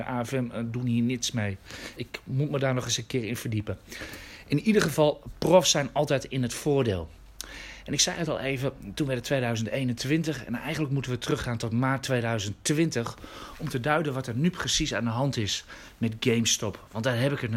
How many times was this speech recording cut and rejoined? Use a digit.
1